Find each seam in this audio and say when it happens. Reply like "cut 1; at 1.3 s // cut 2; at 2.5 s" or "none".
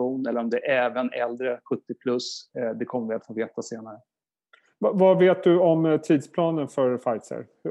none